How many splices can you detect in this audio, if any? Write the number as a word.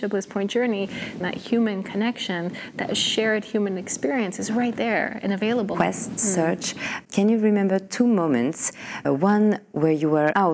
three